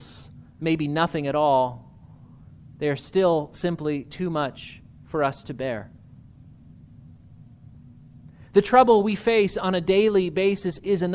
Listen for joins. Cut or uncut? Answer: uncut